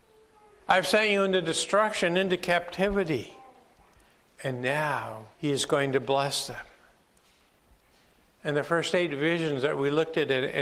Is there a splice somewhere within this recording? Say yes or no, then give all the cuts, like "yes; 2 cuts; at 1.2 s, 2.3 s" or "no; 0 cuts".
yes; 2 cuts; at 4.3 s, 5.3 s